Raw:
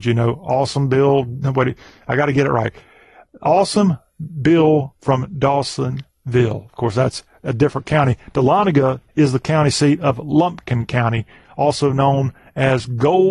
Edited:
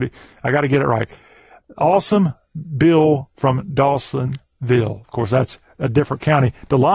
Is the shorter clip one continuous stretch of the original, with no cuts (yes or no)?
yes